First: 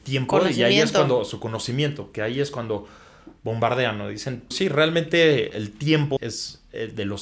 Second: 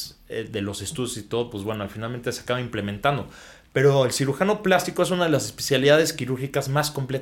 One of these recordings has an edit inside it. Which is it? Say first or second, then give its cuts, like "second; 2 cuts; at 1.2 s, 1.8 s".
first; 2 cuts; at 4.5 s, 6.2 s